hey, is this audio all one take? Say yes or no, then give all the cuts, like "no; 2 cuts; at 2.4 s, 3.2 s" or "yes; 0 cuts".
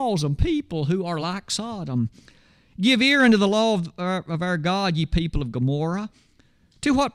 yes; 0 cuts